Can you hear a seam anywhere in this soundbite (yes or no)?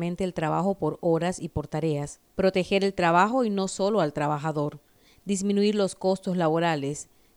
yes